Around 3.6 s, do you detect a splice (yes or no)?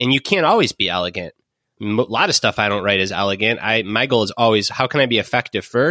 no